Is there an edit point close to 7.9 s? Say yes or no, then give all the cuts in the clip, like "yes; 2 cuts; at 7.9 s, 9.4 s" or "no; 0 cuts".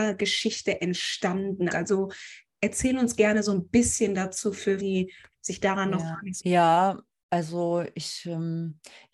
no; 3 cuts; at 1.7 s, 4.8 s, 6.4 s